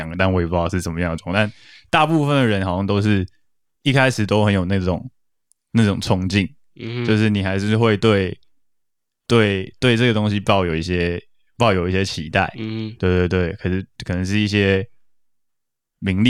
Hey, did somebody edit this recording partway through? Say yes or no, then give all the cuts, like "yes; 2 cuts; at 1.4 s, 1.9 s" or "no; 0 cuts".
no; 0 cuts